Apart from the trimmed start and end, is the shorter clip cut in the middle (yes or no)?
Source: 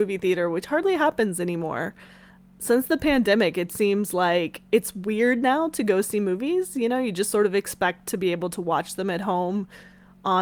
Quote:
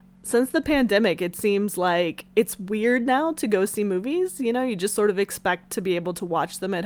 no